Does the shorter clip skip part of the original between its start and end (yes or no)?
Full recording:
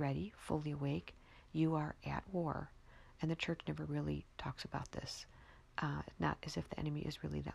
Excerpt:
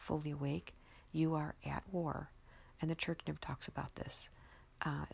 yes